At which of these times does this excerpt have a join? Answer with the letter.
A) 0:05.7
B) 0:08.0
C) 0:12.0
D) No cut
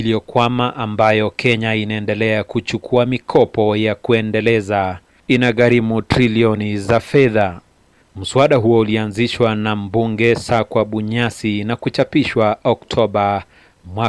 B